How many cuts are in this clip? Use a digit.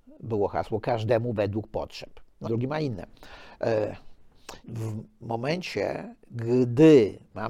2